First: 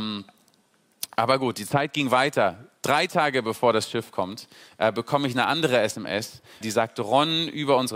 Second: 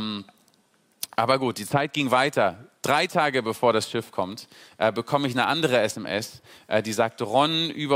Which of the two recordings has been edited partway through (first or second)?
first